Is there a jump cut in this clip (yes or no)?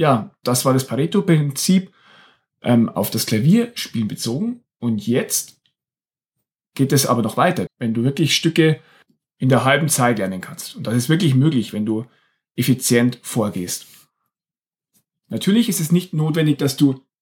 yes